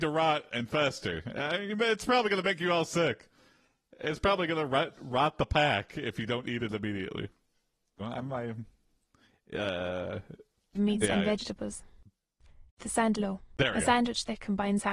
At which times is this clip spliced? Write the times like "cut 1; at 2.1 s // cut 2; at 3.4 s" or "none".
cut 1; at 8.0 s // cut 2; at 10.7 s // cut 3; at 12.7 s